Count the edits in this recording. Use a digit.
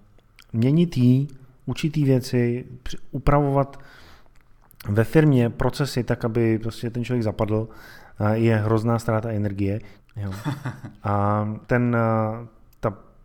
2